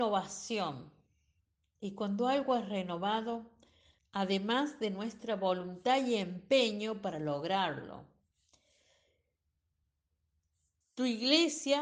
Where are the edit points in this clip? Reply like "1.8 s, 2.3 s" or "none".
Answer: 4.0 s, 10.8 s

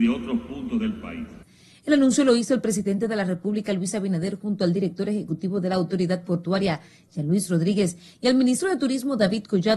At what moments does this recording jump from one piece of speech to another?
none

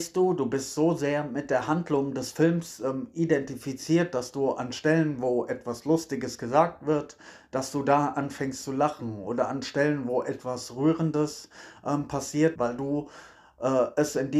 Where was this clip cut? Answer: 12.6 s

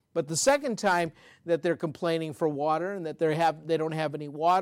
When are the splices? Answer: none

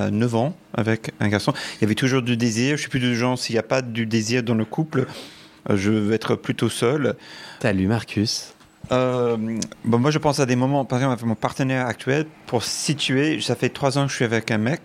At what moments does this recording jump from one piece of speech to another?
7.6 s

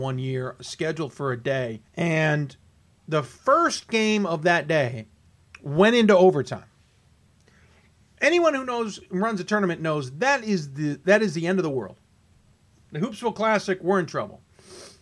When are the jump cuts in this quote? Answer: 1.9 s

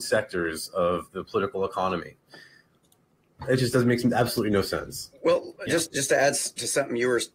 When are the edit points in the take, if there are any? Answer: none

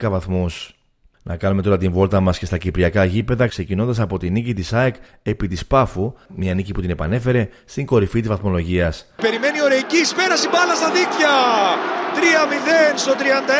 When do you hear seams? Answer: 9.2 s

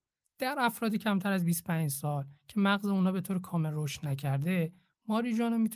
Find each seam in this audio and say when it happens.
none

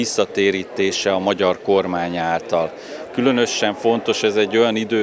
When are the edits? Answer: 3.0 s

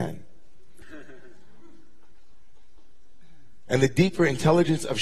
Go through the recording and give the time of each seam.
3.7 s

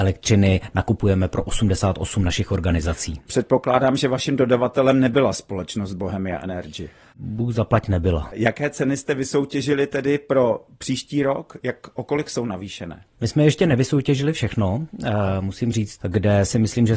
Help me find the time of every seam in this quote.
16.0 s

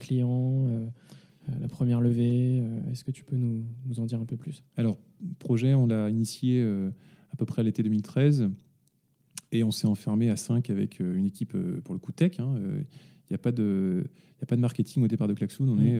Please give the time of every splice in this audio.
none

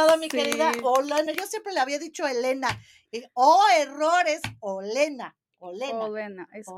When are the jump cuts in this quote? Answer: none

